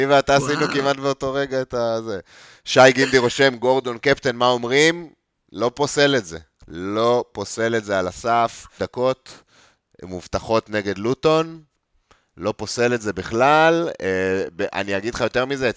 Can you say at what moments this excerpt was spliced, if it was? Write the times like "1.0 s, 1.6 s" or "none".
8.8 s